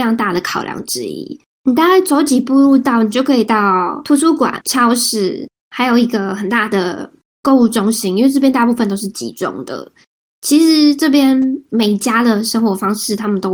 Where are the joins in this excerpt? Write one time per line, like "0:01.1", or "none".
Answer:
0:01.4